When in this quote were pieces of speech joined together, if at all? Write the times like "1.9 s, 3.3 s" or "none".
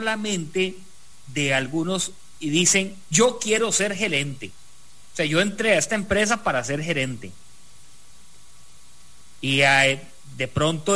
none